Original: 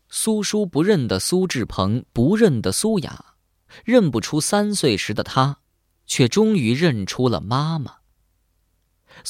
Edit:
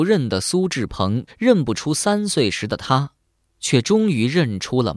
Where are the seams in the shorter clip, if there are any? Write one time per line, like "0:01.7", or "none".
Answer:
0:01.3